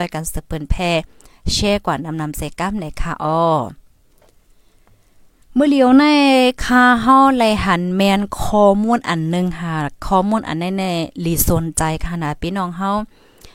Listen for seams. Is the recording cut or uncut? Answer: uncut